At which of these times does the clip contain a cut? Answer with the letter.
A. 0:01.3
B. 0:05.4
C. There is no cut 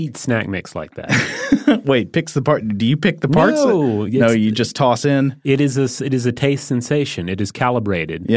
C